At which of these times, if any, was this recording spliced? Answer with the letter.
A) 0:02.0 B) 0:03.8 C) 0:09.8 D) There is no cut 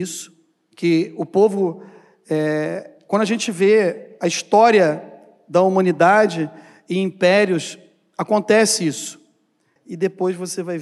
C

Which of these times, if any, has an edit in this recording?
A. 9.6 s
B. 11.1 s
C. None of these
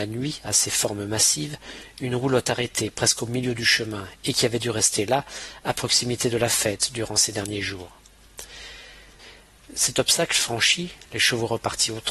C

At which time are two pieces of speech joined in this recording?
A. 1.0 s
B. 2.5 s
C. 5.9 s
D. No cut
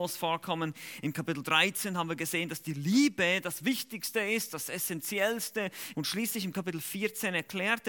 C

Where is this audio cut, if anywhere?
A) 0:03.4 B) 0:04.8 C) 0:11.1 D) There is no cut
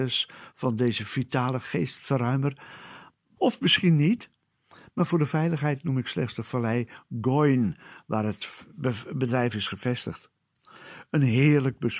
A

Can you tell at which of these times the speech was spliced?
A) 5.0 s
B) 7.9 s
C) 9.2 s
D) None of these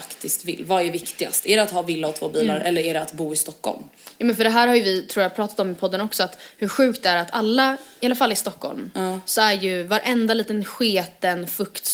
D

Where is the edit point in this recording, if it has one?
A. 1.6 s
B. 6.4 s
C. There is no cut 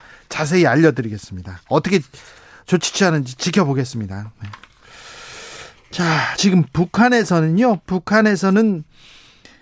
C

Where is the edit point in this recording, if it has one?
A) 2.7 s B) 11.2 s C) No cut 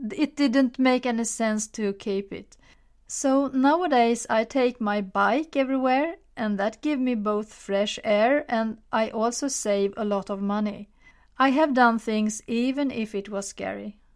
C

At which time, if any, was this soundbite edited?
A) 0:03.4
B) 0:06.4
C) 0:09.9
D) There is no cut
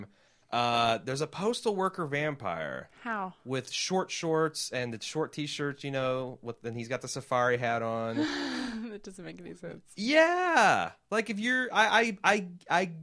D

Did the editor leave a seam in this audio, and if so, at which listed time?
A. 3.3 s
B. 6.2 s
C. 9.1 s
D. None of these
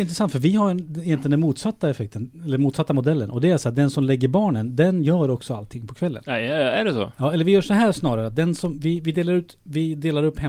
D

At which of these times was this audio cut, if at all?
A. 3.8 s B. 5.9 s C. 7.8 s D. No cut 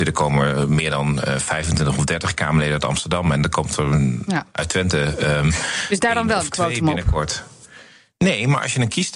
D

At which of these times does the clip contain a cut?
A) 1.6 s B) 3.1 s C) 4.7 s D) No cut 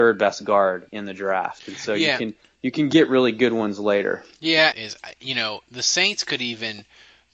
C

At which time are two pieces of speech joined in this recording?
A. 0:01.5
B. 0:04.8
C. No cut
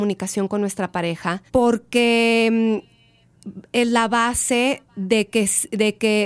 A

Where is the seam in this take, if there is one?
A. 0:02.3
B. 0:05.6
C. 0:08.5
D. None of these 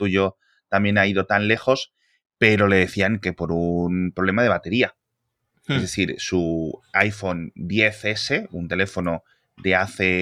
D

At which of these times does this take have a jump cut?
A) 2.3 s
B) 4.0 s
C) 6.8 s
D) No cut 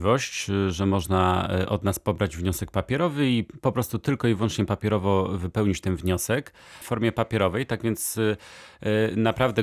C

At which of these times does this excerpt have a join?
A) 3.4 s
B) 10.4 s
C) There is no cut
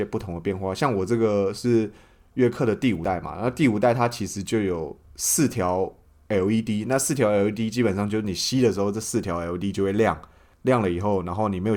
C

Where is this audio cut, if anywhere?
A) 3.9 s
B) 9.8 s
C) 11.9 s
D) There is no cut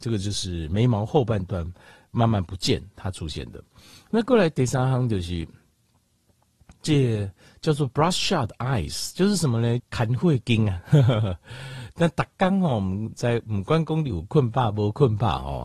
B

